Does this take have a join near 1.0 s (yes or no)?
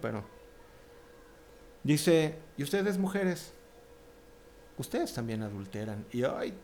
no